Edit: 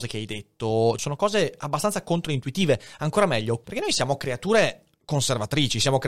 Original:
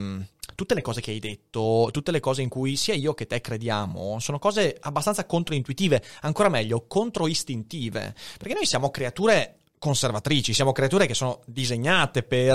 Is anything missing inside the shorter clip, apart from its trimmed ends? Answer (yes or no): yes